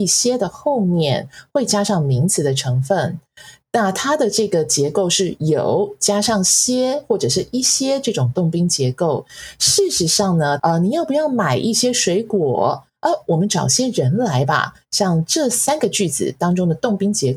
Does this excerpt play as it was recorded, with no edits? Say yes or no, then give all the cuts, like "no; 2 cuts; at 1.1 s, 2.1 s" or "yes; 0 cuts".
no; 1 cut; at 10.6 s